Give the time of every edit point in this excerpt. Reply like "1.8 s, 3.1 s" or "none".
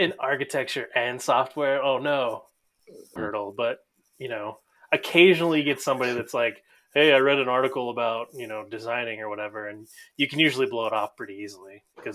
3.2 s